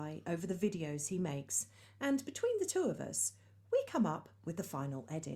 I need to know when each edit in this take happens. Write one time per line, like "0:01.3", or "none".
none